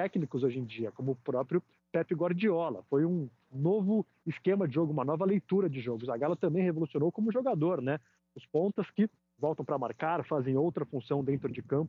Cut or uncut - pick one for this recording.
uncut